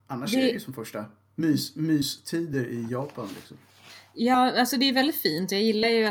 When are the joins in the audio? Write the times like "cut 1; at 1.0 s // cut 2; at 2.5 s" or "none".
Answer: none